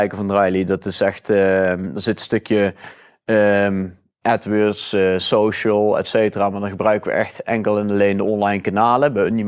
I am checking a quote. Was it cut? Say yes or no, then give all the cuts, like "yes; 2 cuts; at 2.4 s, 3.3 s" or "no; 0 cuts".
no; 0 cuts